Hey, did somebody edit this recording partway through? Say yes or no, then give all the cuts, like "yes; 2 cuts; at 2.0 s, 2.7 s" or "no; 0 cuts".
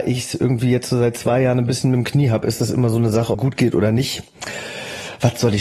yes; 1 cut; at 3.3 s